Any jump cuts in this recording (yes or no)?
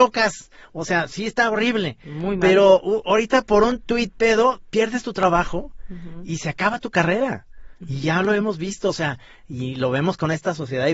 no